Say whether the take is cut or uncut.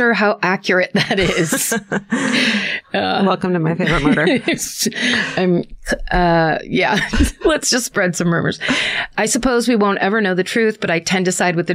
uncut